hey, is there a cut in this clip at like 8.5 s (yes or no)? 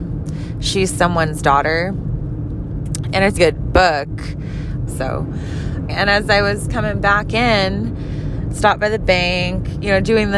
no